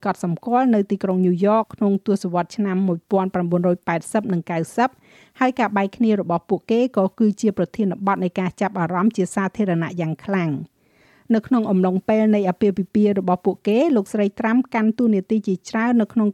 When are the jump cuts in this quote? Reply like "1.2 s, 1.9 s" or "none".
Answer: 1.6 s